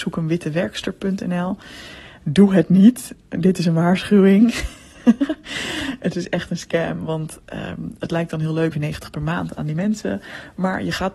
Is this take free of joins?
no; 1 cut; at 8.7 s

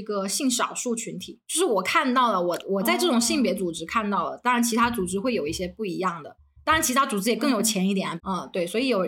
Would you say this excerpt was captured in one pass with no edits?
no; 1 cut; at 8.2 s

